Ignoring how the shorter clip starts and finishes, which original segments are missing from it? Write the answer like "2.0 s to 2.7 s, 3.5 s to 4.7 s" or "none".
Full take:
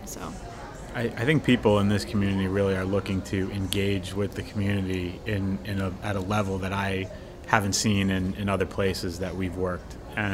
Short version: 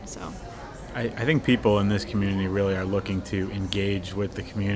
none